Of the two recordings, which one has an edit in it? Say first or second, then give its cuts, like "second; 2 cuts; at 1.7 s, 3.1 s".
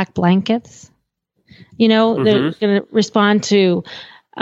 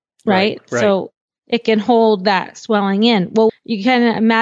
second; 1 cut; at 3.5 s